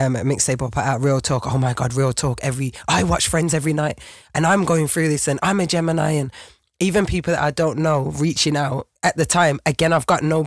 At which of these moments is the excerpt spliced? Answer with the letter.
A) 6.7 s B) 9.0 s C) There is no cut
B